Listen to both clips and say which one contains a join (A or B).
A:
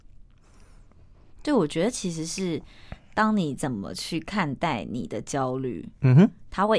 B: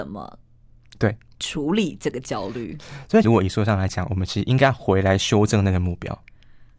B